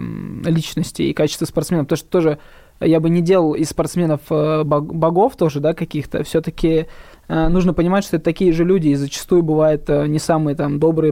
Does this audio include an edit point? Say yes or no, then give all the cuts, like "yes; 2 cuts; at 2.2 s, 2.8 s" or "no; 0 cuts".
no; 0 cuts